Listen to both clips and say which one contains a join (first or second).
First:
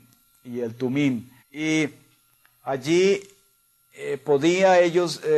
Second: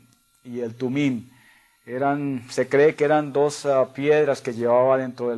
first